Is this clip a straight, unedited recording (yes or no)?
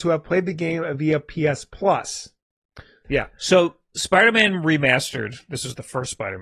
no